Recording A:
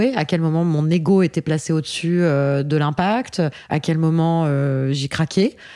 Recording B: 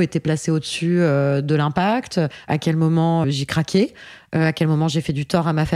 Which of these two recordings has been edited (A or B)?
B